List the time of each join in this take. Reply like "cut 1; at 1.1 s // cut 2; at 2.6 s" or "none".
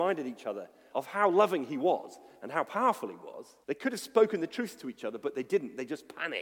cut 1; at 0.9 s // cut 2; at 3.6 s